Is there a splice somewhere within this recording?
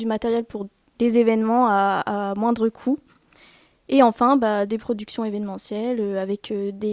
no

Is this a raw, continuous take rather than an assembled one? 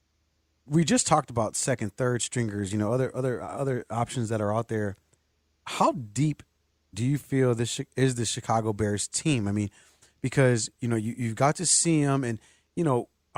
yes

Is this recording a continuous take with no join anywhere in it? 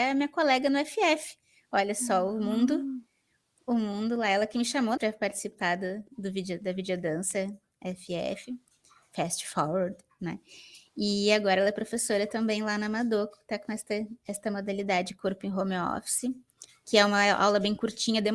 no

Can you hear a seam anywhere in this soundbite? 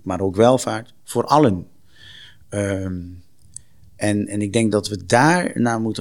no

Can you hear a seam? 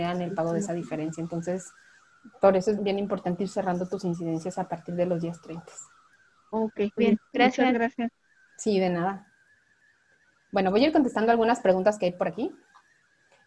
yes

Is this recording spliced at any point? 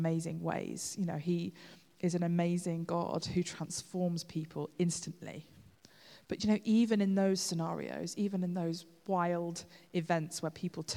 no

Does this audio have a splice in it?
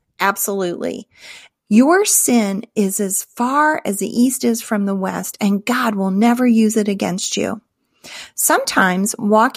yes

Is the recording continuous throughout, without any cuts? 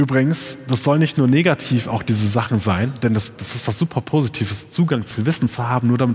no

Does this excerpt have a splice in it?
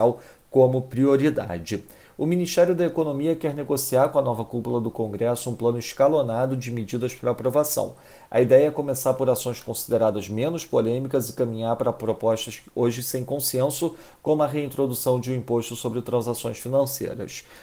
no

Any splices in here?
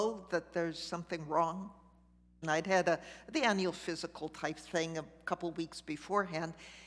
yes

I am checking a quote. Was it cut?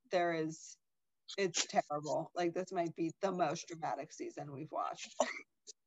no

